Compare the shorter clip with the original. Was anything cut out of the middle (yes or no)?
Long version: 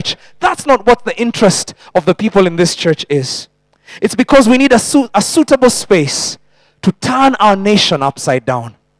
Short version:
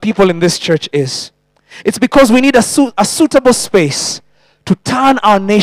no